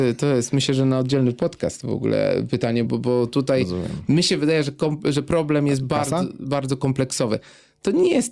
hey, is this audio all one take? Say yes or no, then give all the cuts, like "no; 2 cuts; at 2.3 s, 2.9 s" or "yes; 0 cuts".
no; 1 cut; at 2.9 s